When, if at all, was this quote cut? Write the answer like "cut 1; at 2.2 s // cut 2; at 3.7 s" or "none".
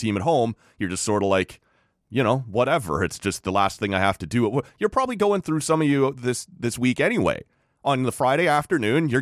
none